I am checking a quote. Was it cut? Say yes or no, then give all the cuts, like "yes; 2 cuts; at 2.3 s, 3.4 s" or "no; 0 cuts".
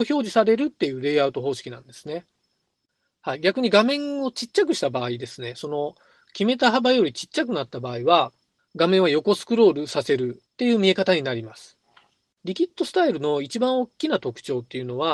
yes; 1 cut; at 12.3 s